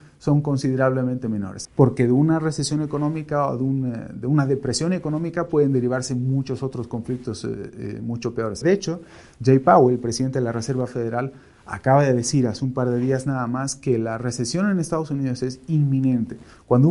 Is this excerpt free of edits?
no; 2 cuts; at 1.6 s, 8.6 s

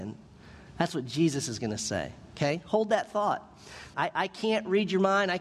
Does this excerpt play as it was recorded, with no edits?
no; 1 cut; at 3.9 s

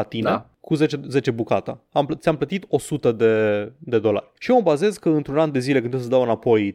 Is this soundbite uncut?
no; 1 cut; at 4.4 s

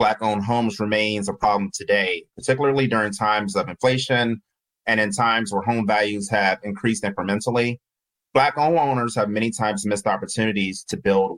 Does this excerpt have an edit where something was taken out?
yes; 1 cut; at 2.3 s

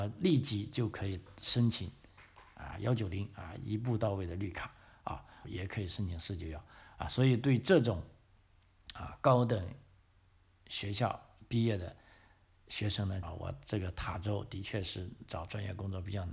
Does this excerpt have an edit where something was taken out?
yes; 2 cuts; at 5.4 s, 13.2 s

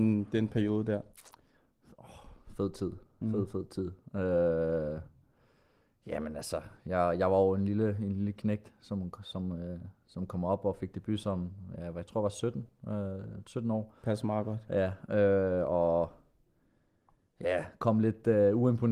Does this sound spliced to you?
no; 0 cuts

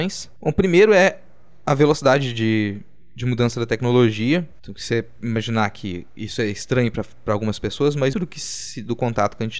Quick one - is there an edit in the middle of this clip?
yes; 2 cuts; at 4.5 s, 8.1 s

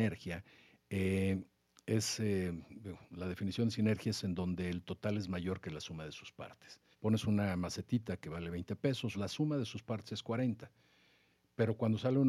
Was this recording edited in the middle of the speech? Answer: yes; 2 cuts; at 6.9 s, 9.1 s

